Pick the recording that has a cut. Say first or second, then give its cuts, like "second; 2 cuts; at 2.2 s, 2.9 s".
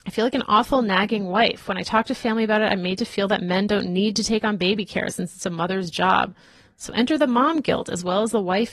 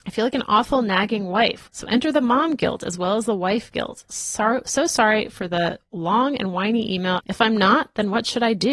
second; 2 cuts; at 1.6 s, 7.2 s